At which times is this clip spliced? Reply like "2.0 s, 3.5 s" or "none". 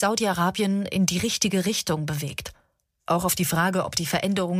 3.0 s